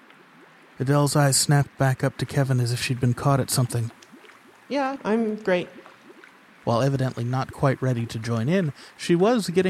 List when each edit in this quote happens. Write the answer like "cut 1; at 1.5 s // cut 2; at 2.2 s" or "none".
cut 1; at 5.0 s // cut 2; at 6.5 s